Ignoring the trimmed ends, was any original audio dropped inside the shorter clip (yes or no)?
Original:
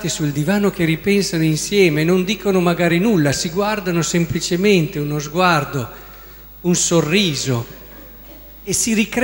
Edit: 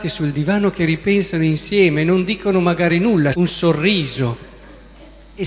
yes